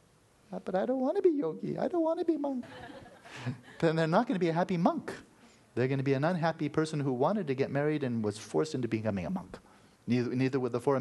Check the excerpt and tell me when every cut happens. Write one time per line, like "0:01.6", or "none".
0:02.6
0:10.0